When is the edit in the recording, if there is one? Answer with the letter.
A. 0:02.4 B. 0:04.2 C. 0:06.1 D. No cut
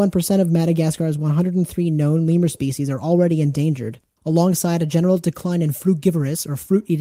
B